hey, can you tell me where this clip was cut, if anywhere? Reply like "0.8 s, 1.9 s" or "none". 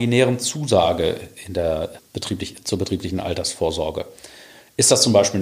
2.0 s